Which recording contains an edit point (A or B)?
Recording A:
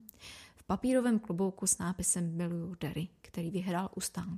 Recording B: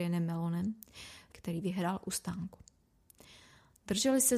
B